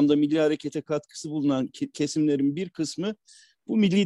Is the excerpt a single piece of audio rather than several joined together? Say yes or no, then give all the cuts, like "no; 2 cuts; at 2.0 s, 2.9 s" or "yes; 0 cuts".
no; 1 cut; at 1.9 s